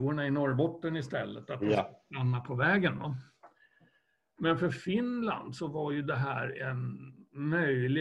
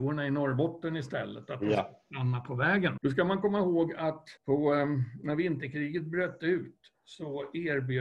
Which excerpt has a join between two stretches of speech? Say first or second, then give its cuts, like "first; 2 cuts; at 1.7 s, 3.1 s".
second; 2 cuts; at 3.0 s, 4.4 s